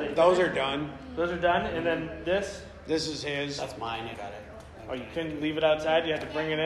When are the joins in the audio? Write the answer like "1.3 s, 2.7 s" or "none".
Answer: 4.1 s